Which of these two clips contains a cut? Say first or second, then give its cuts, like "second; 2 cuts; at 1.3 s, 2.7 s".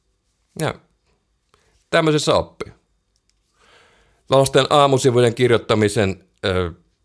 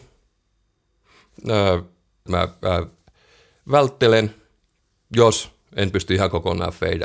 second; 1 cut; at 2.3 s